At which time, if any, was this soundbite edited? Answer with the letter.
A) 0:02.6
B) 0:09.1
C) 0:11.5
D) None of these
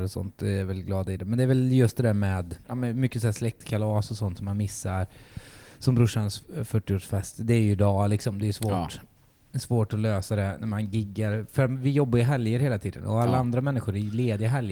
A